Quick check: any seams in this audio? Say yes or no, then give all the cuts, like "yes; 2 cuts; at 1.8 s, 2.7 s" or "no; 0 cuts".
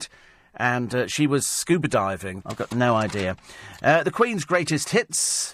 yes; 1 cut; at 2.4 s